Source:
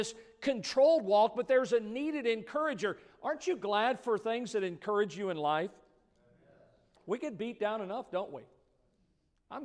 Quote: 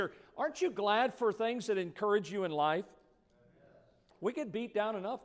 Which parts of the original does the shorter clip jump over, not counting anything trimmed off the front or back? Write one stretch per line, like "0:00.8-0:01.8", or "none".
none

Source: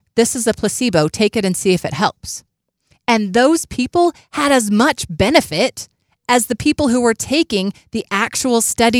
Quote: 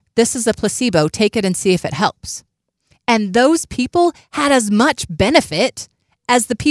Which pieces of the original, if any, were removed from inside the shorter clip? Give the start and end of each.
none

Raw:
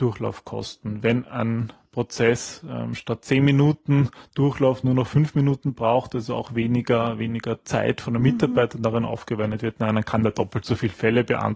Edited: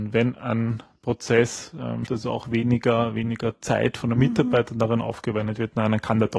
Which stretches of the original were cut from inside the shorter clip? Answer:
0:03.0-0:06.1

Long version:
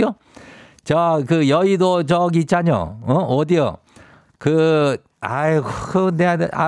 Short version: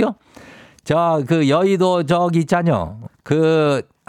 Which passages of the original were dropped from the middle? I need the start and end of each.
0:03.1-0:04.2

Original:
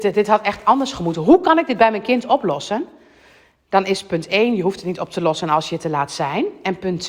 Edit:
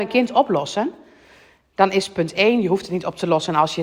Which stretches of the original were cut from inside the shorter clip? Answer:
none

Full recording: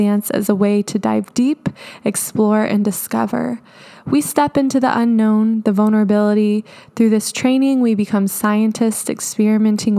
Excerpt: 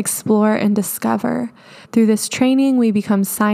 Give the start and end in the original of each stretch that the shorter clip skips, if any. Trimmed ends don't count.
0:03.9-0:06.9

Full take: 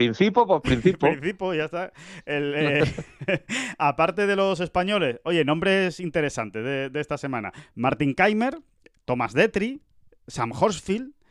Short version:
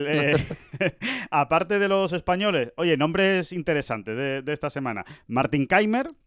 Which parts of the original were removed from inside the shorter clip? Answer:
none

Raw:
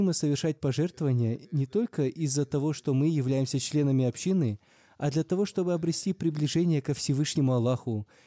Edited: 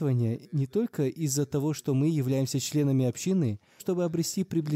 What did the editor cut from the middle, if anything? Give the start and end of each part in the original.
0:04.8-0:05.5

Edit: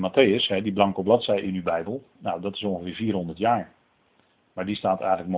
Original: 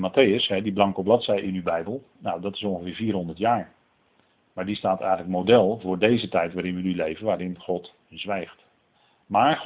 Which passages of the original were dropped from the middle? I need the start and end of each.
none

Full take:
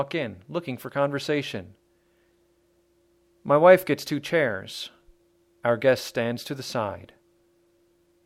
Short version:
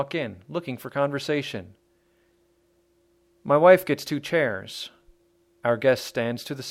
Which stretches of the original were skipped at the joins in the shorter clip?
none

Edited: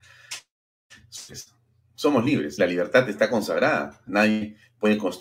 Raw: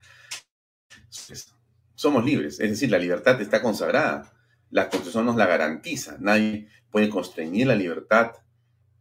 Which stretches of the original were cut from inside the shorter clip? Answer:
0:02.6-0:02.9
0:04.4-0:06.2

